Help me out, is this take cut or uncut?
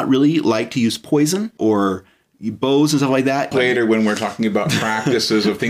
cut